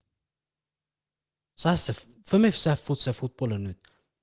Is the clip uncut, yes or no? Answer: yes